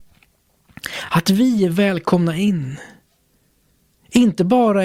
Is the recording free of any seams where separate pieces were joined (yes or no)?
yes